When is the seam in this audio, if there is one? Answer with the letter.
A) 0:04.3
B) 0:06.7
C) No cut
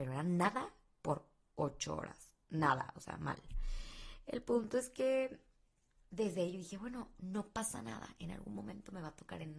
C